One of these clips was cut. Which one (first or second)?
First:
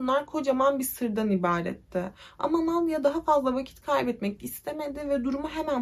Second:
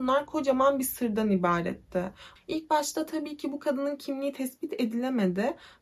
second